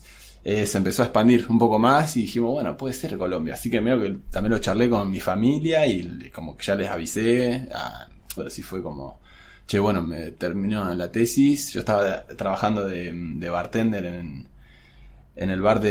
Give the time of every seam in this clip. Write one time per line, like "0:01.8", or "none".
0:08.4